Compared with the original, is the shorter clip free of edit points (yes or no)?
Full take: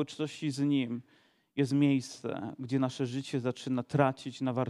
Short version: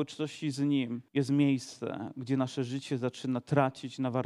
no